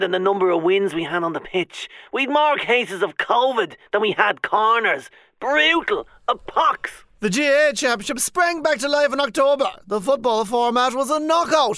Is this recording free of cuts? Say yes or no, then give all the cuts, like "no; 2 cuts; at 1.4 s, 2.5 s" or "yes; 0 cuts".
yes; 0 cuts